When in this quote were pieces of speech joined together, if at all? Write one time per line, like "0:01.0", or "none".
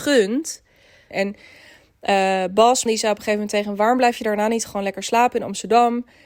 0:01.1
0:02.9

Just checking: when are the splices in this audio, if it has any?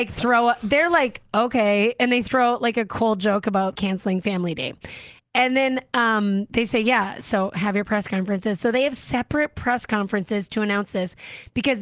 0:03.8

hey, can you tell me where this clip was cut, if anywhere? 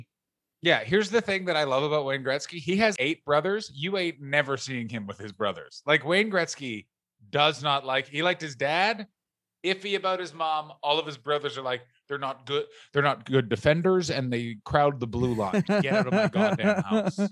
0:03.0

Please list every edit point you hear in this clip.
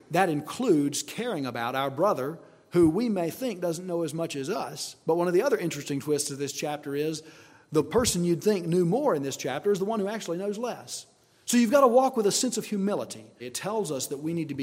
0:13.4

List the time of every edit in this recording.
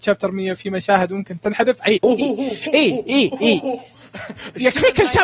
0:02.0

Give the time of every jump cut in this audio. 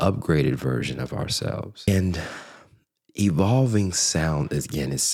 none

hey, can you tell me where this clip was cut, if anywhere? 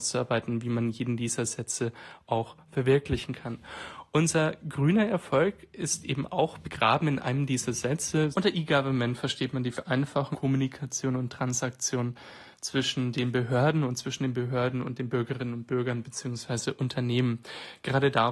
0:08.3
0:10.3

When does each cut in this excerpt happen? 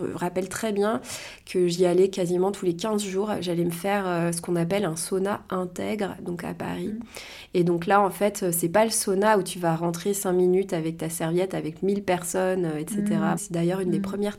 0:13.4

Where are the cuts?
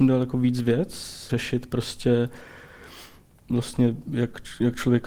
0:01.3

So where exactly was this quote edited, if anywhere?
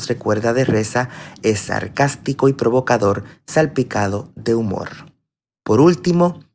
none

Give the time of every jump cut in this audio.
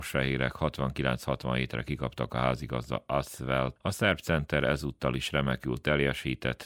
0:03.8

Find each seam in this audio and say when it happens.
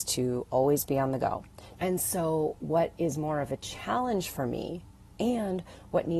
0:01.8

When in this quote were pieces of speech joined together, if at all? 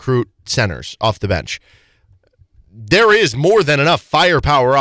none

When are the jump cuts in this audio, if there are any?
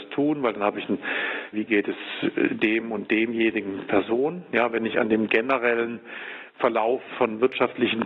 0:01.5

